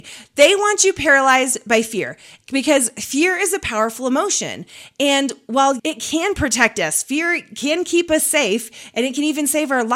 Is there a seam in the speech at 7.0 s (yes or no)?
no